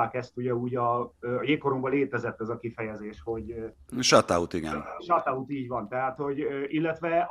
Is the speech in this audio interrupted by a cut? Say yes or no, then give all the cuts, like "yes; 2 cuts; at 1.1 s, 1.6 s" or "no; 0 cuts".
no; 0 cuts